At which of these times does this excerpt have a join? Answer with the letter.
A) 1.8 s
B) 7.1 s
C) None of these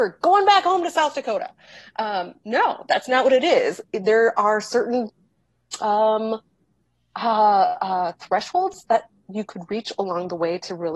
C